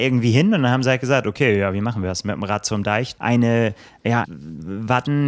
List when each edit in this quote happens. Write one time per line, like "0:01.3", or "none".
0:03.2
0:04.2